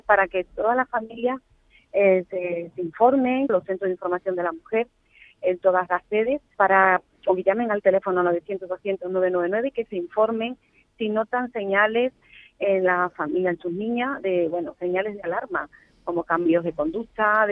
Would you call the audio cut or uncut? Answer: cut